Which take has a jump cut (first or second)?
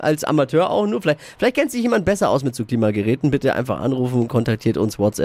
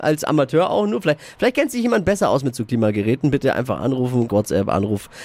second